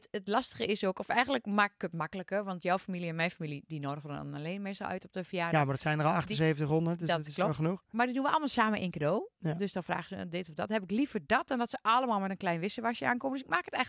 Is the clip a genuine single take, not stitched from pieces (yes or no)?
yes